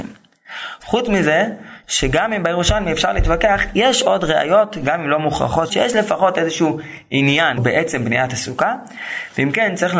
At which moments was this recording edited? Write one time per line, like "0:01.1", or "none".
0:05.7
0:07.6